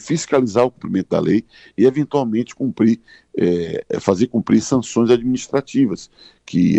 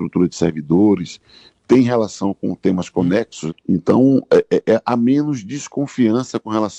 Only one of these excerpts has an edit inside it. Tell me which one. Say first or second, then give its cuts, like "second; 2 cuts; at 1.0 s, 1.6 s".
second; 1 cut; at 3.5 s